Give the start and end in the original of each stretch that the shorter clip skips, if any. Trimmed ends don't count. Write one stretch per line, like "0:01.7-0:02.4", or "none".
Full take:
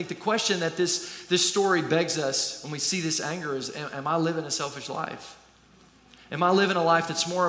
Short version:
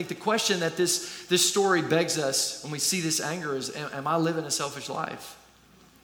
none